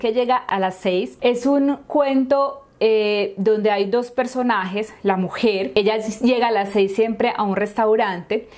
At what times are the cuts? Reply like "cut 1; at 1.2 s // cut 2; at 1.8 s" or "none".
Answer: none